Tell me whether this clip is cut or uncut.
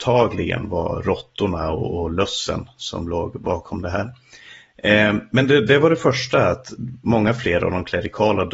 uncut